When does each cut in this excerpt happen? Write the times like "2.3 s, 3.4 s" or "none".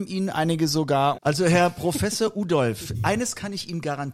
1.1 s